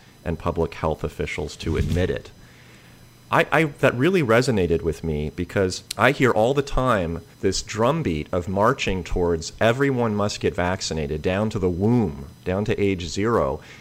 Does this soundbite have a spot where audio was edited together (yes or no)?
yes